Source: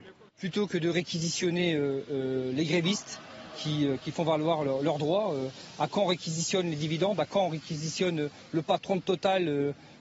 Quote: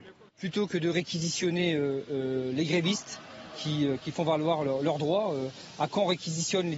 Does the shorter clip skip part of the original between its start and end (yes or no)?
no